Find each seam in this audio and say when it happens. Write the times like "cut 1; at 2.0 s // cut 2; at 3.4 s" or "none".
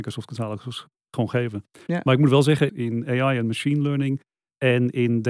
cut 1; at 2.7 s